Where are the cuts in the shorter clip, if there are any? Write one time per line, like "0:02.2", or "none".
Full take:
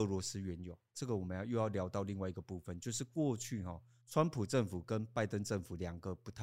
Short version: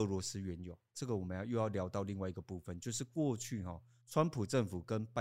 none